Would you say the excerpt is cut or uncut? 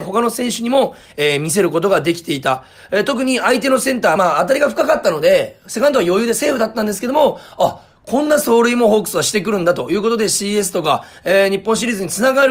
uncut